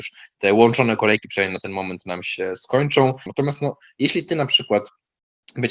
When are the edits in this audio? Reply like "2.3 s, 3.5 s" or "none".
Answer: 3.3 s